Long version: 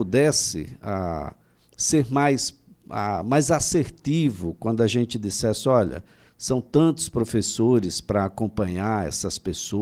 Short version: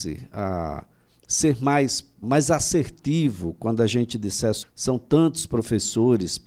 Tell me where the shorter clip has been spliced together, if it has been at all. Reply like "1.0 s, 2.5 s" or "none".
2.2 s, 4.6 s